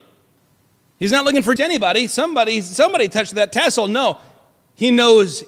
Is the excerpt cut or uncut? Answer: cut